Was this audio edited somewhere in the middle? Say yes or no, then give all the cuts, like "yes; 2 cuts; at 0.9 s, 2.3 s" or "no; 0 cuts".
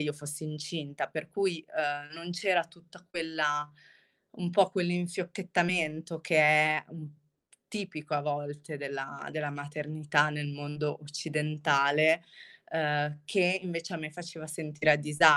no; 0 cuts